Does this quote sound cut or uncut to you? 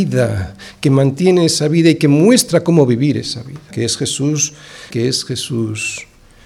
cut